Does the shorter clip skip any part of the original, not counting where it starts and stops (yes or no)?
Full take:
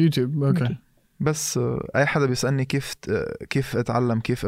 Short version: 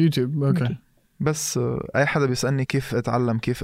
yes